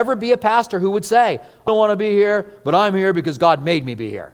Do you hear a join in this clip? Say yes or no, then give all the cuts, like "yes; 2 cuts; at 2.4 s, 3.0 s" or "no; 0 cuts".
yes; 1 cut; at 1.7 s